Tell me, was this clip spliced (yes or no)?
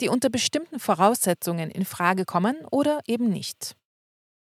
no